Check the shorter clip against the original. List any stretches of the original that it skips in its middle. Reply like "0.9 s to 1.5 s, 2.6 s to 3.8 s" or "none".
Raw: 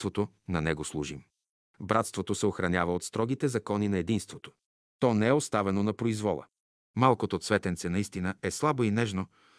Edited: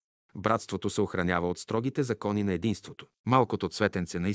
4.6 s to 6.9 s